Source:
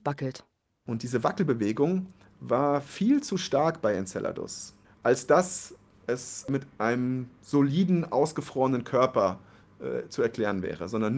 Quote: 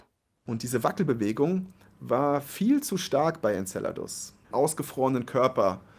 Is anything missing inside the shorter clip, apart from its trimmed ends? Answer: yes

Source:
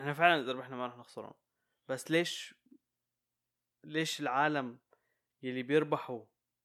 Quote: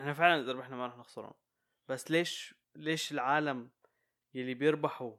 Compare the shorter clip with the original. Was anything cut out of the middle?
yes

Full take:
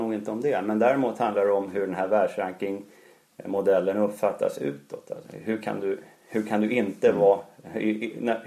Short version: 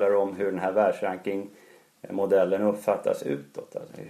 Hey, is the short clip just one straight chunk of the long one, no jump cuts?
yes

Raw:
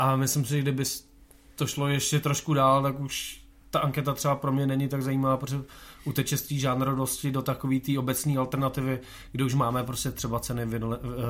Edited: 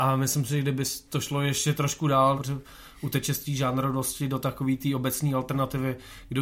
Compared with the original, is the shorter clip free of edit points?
no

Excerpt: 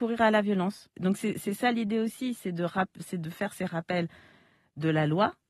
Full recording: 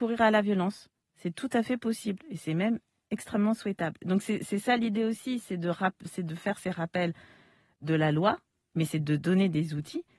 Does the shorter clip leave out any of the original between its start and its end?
yes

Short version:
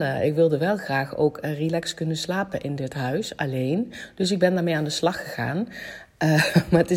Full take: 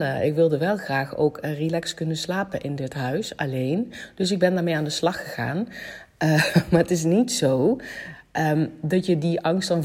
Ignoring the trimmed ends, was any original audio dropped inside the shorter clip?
no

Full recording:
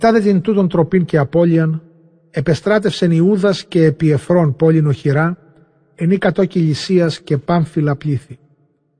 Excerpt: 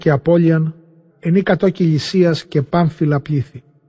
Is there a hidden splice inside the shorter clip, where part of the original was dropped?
yes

